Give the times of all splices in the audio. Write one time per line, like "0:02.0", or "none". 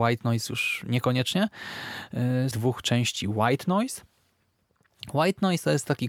0:02.5

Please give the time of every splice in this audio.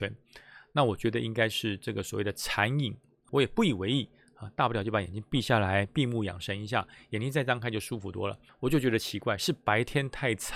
0:08.5

